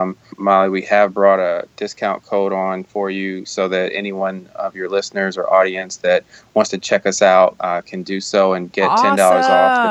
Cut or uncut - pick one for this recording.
uncut